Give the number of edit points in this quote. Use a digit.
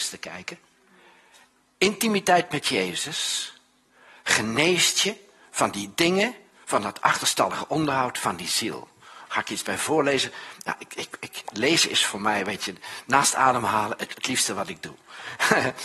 1